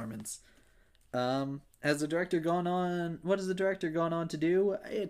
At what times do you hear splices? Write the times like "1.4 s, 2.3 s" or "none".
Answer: none